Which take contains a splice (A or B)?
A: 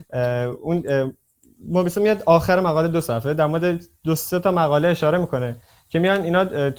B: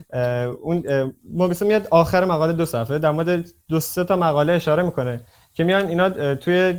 B